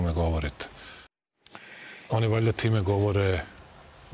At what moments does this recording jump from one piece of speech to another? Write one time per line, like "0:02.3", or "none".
0:02.1